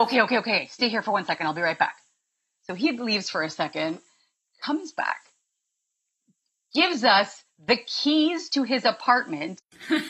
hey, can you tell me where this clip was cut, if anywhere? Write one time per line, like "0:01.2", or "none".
none